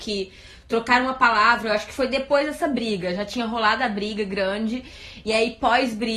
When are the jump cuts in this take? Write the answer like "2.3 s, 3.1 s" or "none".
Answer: none